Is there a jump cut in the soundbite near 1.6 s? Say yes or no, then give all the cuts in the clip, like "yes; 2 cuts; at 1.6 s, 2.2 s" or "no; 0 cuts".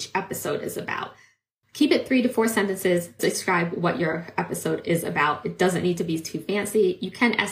no; 1 cut; at 3.2 s